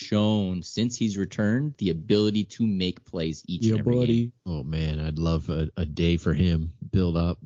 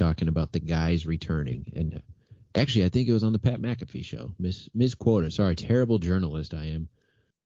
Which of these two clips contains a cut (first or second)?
first